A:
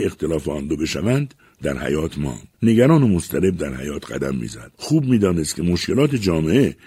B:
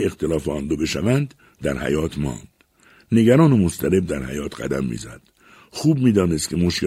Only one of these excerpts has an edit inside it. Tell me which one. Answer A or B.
A